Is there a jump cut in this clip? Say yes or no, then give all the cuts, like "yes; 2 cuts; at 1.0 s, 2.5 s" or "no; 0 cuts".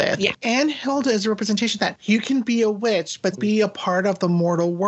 yes; 2 cuts; at 2.0 s, 3.3 s